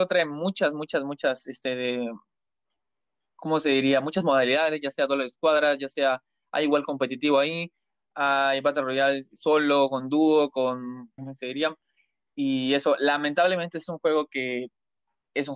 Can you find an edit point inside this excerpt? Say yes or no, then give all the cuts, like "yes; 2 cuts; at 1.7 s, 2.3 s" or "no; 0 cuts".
yes; 1 cut; at 11.2 s